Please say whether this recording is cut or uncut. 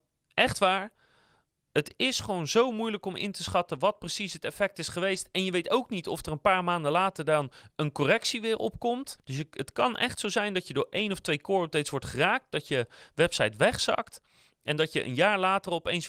cut